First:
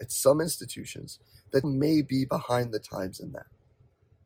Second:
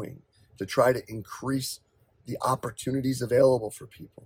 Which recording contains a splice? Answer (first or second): first